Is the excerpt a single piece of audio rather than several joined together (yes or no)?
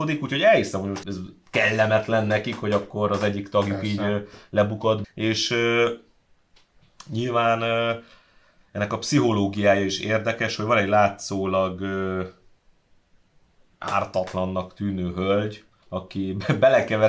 no